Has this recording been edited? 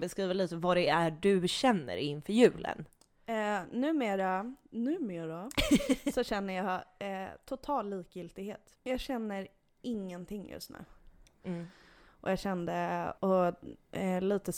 yes; 3 cuts; at 8.8 s, 11.3 s, 13.2 s

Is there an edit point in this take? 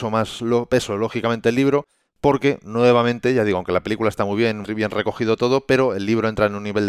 yes; 1 cut; at 4.6 s

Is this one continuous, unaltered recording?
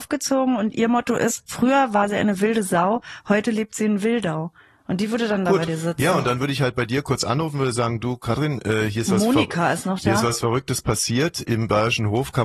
yes; 0 cuts

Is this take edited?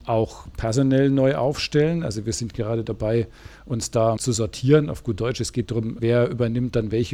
yes; 2 cuts; at 4.2 s, 6.0 s

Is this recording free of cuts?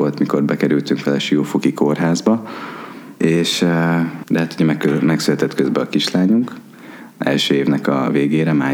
no; 2 cuts; at 3.2 s, 4.2 s

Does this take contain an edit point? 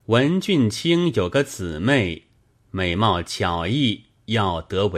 no; 0 cuts

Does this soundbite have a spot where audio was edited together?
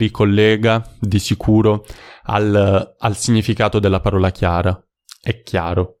no; 0 cuts

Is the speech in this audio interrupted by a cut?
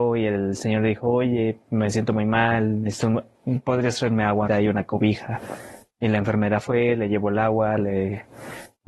yes; 1 cut; at 4.5 s

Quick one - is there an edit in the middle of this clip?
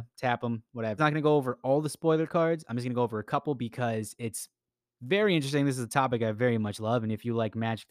yes; 1 cut; at 1.0 s

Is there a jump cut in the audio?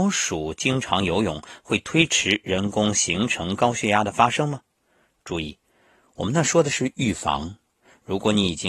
no; 0 cuts

